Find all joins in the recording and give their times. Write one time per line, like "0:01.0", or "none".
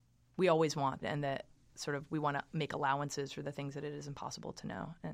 0:01.0